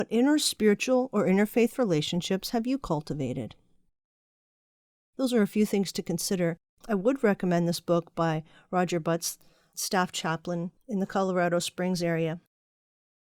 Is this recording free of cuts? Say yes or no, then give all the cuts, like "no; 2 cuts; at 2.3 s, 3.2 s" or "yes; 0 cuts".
yes; 0 cuts